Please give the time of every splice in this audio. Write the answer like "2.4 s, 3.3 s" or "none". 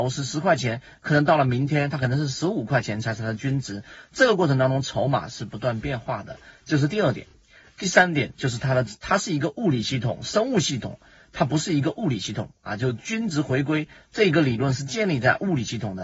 none

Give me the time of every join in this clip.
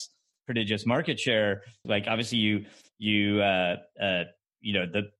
1.8 s

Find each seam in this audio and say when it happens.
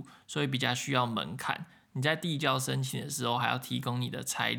none

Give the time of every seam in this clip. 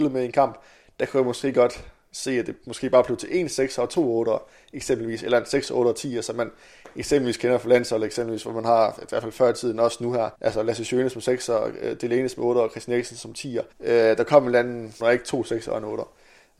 10.3 s, 13.7 s, 15.0 s

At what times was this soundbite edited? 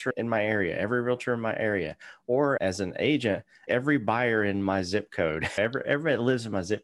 5.8 s

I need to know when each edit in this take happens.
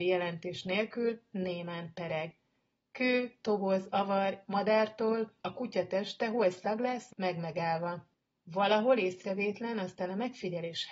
4.4 s, 7.1 s

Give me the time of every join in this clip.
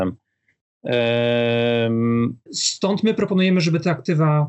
2.5 s

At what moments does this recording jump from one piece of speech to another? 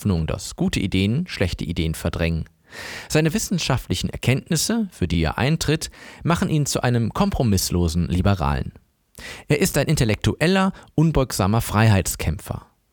none

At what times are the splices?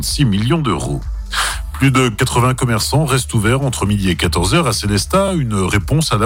none

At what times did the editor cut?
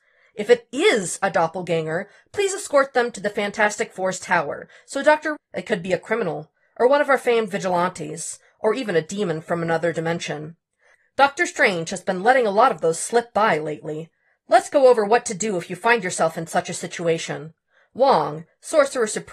5.3 s

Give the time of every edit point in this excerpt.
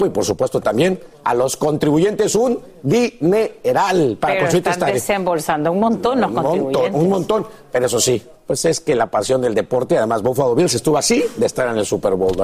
none

